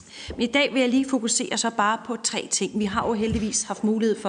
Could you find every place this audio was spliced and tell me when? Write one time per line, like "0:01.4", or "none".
none